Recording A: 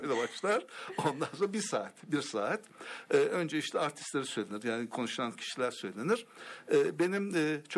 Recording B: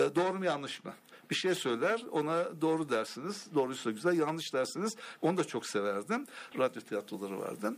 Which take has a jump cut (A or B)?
B